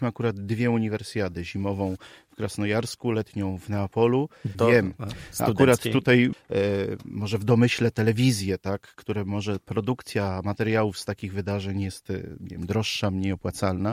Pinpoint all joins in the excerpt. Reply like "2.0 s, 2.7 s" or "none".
4.5 s, 6.3 s

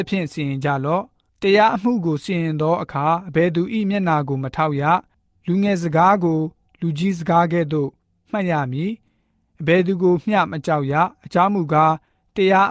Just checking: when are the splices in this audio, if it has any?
none

